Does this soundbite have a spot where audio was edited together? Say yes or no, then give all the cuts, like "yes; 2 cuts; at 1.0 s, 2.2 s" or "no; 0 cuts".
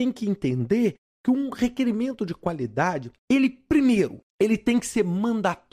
yes; 2 cuts; at 3.2 s, 4.3 s